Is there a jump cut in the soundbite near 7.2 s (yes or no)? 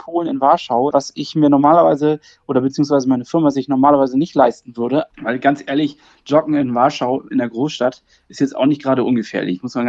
no